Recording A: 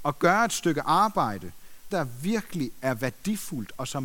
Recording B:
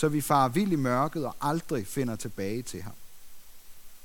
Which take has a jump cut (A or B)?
A